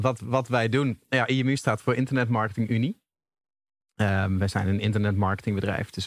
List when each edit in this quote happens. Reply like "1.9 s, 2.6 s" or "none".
none